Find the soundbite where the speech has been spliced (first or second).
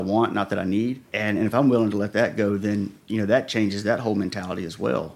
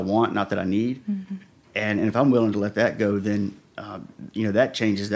first